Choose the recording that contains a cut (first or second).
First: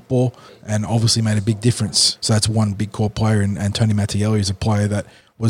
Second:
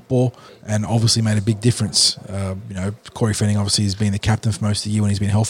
first